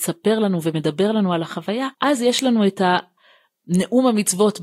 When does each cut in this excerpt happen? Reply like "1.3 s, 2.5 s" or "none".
1.9 s